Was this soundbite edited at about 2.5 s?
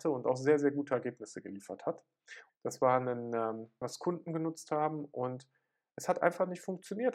yes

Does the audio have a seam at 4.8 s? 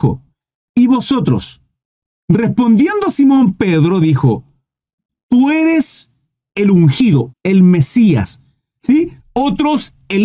no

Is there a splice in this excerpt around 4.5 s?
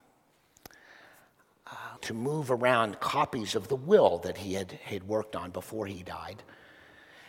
no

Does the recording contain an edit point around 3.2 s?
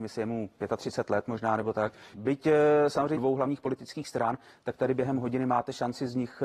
yes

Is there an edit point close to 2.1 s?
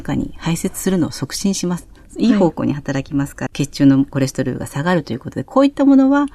no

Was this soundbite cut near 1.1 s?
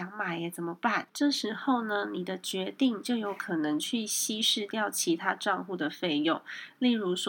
yes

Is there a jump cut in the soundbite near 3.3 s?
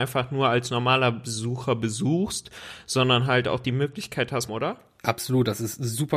no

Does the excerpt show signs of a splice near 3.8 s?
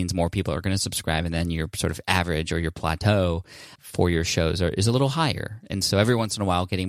yes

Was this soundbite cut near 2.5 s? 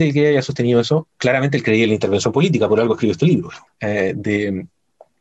no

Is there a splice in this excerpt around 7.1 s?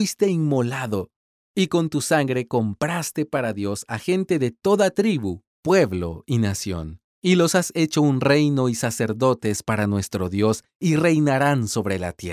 yes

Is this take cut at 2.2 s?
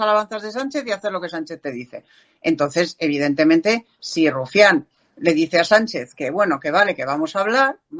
no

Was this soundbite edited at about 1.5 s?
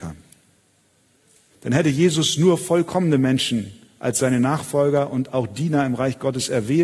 yes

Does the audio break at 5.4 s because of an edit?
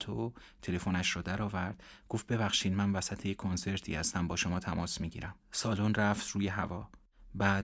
yes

